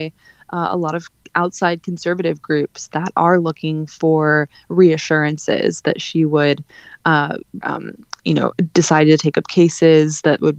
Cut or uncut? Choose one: cut